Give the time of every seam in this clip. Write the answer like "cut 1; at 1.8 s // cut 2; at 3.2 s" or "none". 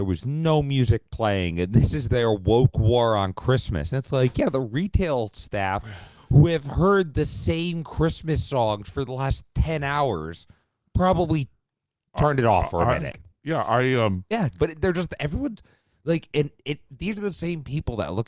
cut 1; at 13.1 s